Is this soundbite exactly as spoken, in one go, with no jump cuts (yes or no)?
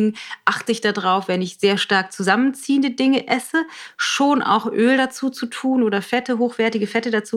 yes